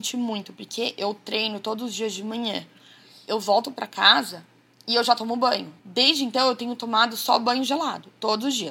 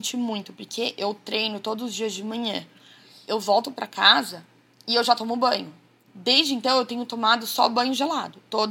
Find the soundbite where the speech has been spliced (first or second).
first